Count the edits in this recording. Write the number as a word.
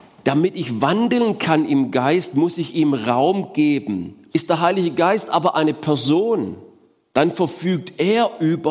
one